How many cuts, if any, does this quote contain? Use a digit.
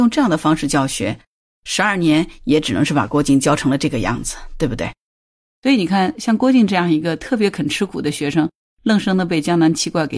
1